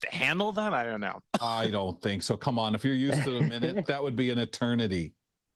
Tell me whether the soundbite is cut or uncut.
cut